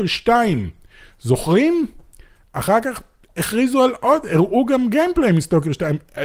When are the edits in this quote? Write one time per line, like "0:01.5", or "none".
none